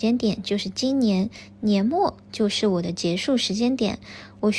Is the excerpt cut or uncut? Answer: uncut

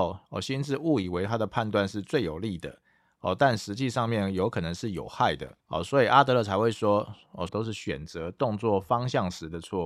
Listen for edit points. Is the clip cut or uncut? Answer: cut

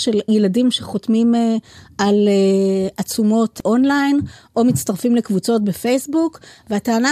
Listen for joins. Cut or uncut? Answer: uncut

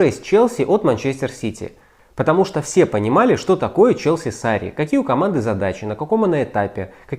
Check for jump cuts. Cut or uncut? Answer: cut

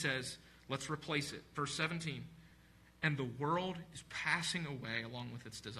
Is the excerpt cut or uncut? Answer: uncut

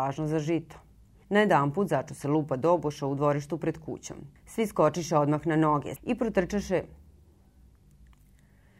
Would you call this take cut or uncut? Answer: cut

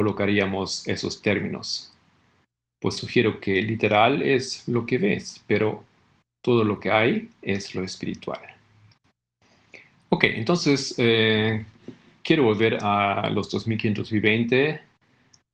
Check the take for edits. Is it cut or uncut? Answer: uncut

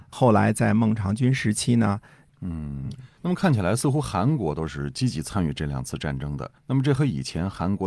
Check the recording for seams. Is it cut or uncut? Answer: cut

